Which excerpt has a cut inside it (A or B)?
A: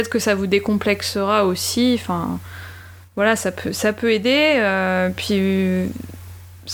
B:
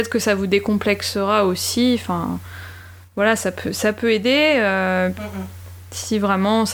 B